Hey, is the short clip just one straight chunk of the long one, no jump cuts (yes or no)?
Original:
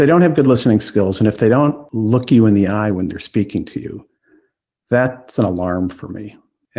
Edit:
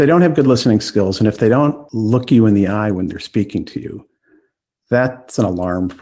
yes